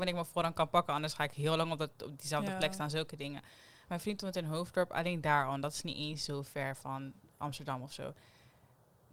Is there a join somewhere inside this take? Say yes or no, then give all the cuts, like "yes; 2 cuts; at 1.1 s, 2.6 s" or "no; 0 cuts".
no; 0 cuts